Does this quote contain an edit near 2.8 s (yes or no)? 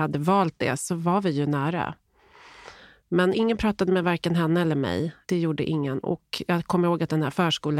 no